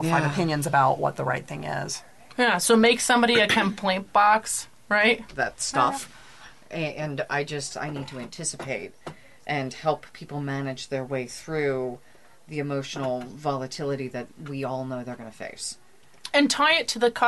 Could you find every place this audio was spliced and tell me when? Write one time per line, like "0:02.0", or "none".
0:05.3
0:07.7